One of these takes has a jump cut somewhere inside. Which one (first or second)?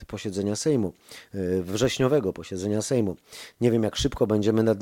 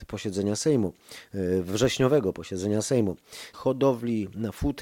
second